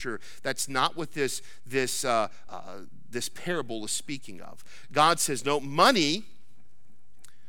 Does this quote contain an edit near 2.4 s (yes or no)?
yes